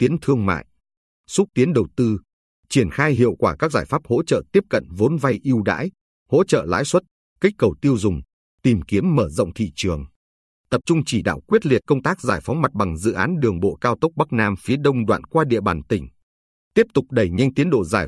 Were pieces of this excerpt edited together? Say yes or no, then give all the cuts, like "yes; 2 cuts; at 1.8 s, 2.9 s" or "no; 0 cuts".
no; 0 cuts